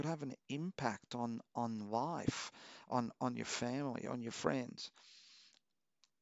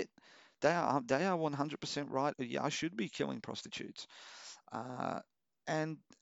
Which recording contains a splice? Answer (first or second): second